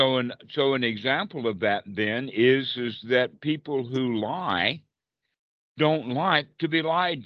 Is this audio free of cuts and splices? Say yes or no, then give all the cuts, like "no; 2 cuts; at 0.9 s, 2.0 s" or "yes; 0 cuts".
yes; 0 cuts